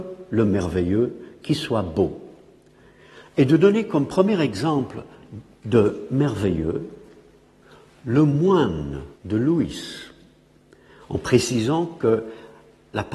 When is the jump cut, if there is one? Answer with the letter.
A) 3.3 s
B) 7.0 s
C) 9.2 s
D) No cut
C